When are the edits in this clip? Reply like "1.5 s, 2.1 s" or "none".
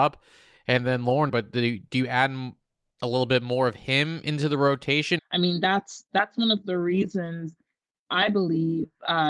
1.3 s, 5.2 s

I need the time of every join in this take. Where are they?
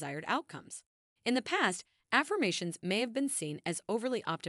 1.2 s

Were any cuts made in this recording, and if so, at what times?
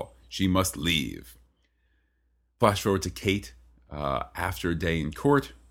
none

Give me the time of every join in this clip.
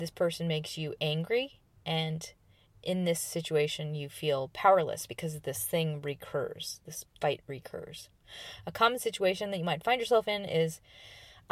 none

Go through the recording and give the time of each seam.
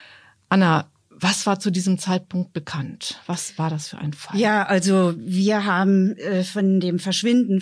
none

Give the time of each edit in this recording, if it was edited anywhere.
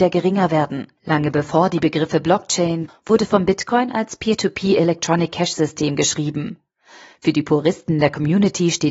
1.0 s, 2.9 s

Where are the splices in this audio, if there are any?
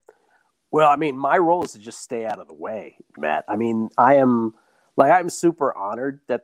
3.2 s

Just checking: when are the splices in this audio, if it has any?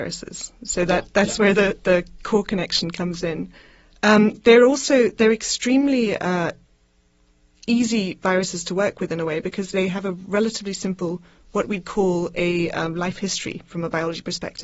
none

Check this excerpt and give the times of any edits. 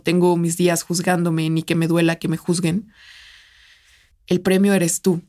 4.1 s

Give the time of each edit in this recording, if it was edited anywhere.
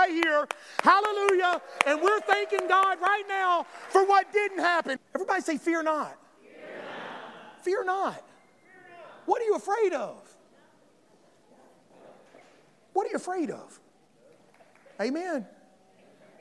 5.0 s

